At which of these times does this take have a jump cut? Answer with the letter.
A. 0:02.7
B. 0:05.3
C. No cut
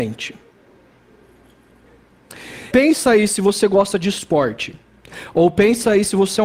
A